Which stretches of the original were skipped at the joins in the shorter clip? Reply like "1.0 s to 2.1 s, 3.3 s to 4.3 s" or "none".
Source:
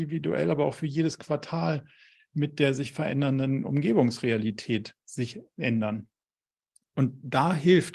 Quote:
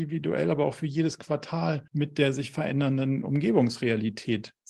1.9 s to 2.3 s